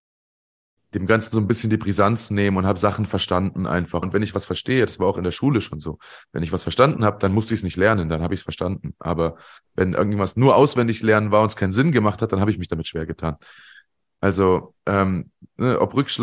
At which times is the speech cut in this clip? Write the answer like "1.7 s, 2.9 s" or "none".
4.0 s, 14.0 s